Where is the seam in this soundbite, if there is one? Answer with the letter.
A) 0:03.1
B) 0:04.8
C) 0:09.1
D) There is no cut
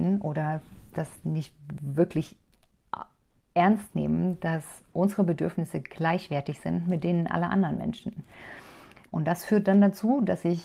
C